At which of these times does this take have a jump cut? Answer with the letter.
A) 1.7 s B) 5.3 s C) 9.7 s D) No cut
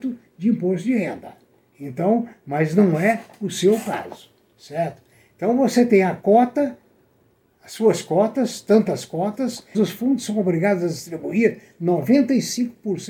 C